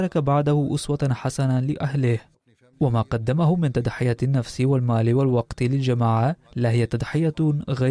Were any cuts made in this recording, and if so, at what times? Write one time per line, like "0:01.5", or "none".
0:06.4